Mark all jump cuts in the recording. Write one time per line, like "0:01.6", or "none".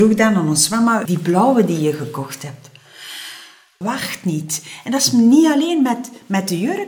0:01.1
0:03.8